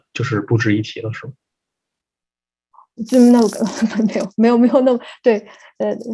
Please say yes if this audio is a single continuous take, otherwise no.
no